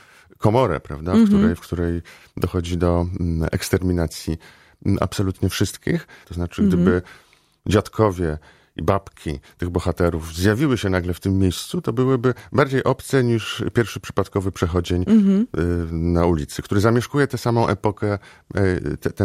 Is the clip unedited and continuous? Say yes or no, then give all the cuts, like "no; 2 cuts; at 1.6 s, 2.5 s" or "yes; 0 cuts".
no; 1 cut; at 6.2 s